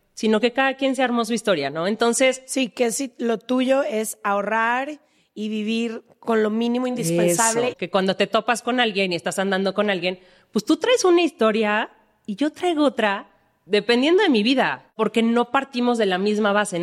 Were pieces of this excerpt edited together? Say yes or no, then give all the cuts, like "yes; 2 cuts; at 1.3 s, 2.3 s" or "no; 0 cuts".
yes; 1 cut; at 7.7 s